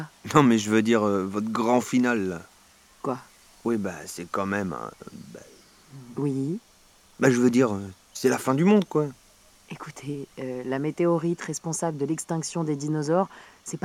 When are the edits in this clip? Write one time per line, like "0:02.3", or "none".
none